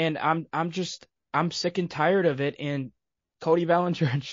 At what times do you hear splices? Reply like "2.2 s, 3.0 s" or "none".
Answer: none